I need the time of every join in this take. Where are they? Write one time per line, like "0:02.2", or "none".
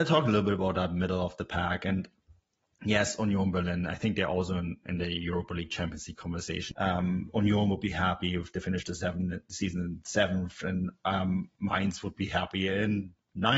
0:06.7

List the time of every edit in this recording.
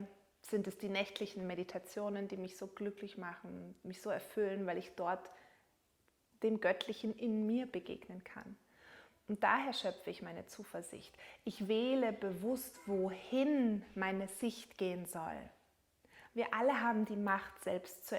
none

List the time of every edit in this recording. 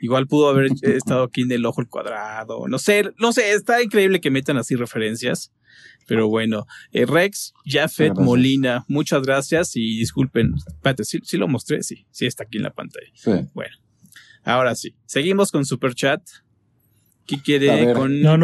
none

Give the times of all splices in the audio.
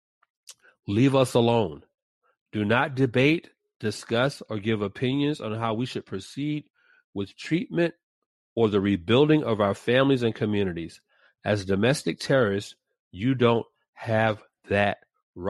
none

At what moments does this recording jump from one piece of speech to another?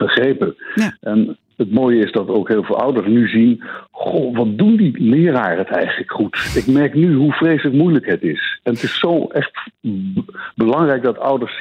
none

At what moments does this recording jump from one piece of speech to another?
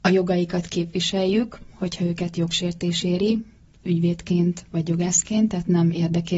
none

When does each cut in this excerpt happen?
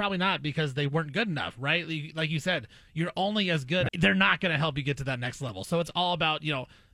0:03.9

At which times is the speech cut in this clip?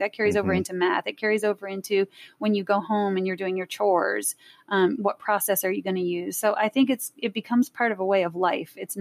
none

